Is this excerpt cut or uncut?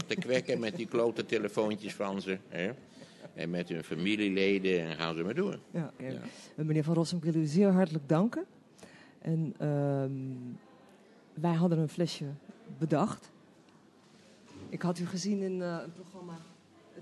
uncut